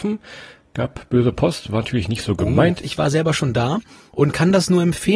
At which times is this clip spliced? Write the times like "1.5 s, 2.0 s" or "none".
2.8 s